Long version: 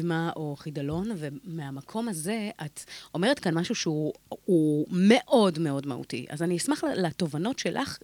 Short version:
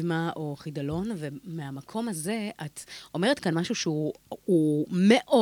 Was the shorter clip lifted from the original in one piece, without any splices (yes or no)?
yes